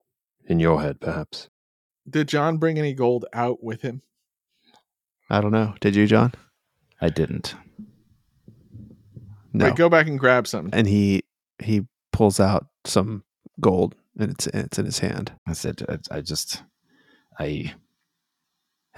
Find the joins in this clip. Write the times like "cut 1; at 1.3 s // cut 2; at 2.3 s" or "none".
cut 1; at 10.7 s // cut 2; at 15.4 s

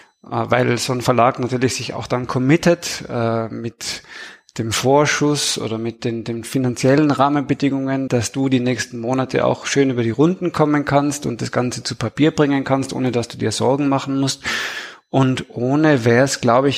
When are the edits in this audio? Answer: cut 1; at 8.1 s

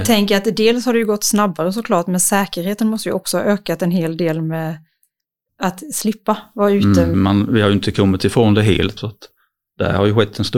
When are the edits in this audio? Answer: cut 1; at 7.1 s // cut 2; at 9.0 s

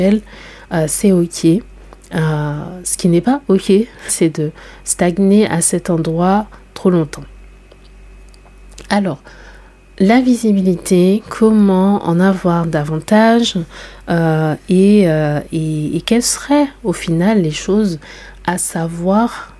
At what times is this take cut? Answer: cut 1; at 4.1 s

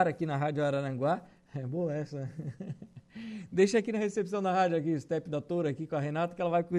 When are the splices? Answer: none

